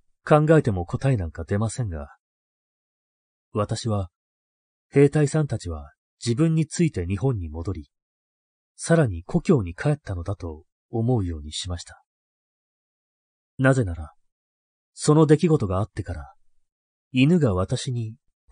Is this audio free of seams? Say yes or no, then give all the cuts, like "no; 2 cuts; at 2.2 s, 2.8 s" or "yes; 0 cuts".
yes; 0 cuts